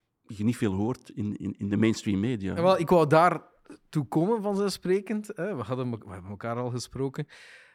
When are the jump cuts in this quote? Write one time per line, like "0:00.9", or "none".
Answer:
none

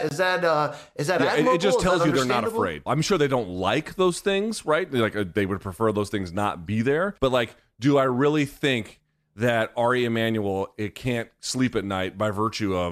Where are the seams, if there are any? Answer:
0:02.9
0:07.2

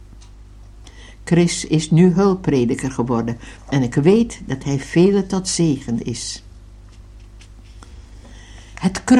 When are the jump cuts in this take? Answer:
none

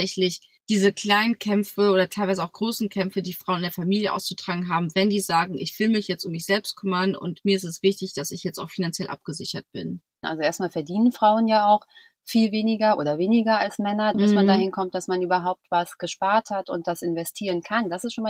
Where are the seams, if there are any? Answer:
0:10.2
0:14.1

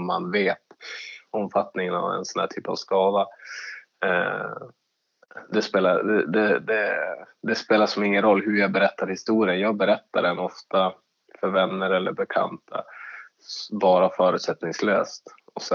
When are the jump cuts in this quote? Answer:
none

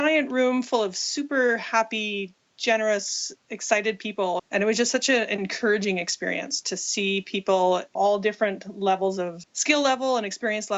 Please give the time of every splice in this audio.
0:04.4
0:09.4

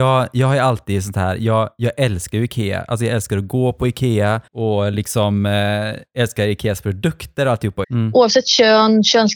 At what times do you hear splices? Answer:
0:04.5
0:07.8

